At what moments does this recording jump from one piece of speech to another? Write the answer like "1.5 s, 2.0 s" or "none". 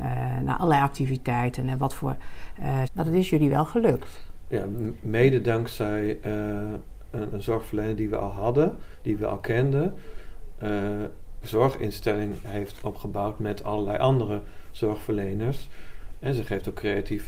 2.8 s, 7.3 s, 11.4 s